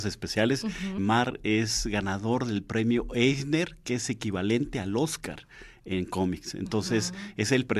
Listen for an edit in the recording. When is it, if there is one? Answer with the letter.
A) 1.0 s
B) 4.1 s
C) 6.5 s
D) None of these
A